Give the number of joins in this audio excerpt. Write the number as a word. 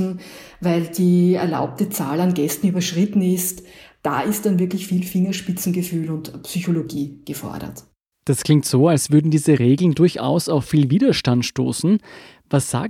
zero